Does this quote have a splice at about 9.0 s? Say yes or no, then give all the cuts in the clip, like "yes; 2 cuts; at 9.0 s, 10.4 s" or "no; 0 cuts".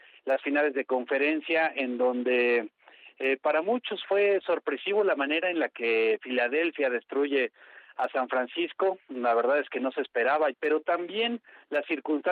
no; 1 cut; at 10.5 s